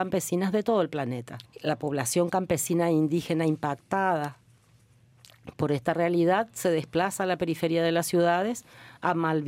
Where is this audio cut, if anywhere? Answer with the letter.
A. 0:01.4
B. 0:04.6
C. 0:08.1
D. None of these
A